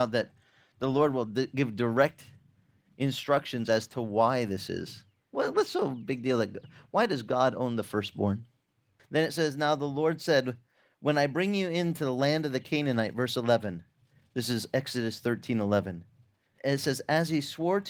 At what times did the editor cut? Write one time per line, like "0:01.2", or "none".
0:09.0